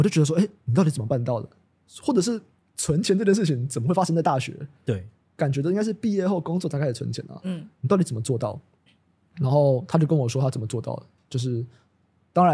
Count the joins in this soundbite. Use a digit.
0